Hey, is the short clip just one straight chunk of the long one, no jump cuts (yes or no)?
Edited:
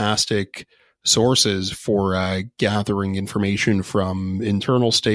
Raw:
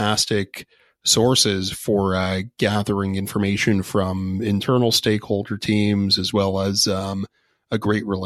yes